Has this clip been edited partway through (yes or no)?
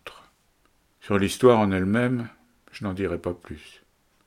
yes